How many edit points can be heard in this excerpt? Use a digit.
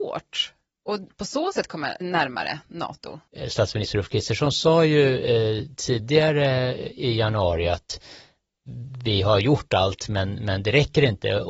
1